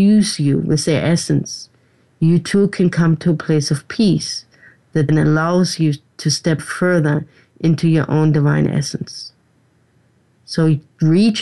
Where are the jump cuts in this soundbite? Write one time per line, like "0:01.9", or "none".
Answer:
0:05.1
0:06.6